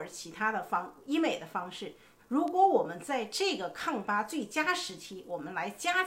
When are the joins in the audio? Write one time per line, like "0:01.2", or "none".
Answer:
0:02.2